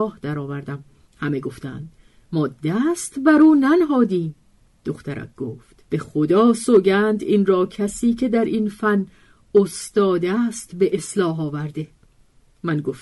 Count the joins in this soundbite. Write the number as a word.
two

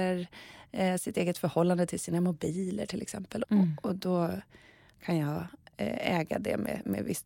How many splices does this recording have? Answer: one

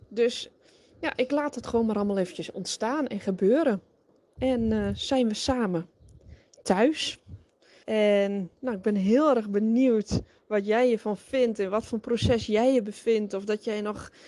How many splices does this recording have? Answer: two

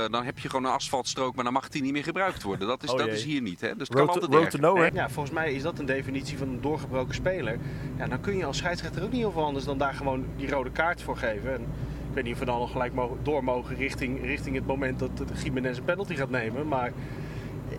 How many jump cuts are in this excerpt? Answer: one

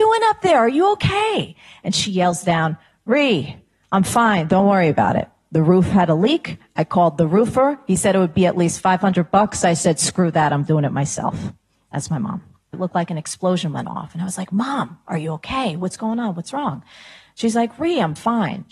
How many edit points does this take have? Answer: one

